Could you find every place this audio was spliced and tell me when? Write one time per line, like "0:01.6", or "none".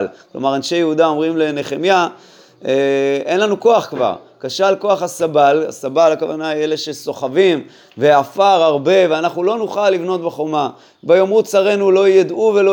none